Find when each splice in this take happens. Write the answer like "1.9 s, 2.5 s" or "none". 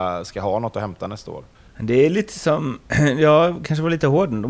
none